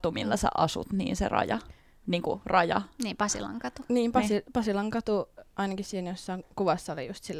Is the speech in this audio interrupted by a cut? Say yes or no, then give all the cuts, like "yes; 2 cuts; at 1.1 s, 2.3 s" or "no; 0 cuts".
no; 0 cuts